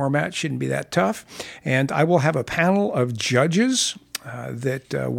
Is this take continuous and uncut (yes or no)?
yes